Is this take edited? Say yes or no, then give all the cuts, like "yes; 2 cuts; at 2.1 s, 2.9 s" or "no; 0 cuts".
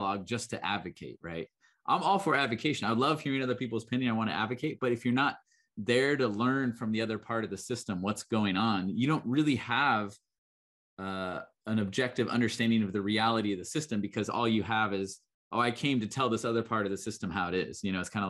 no; 0 cuts